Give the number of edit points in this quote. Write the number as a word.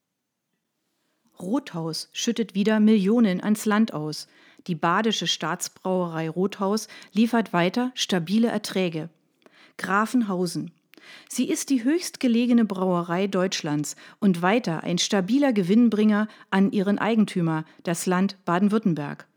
zero